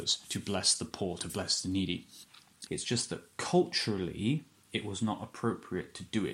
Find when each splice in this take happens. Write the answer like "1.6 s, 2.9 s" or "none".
2.7 s